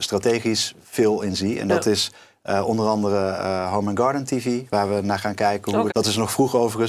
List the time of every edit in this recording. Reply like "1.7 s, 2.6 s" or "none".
4.7 s, 5.9 s